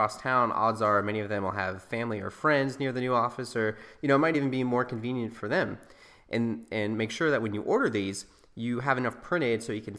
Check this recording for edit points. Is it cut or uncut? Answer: uncut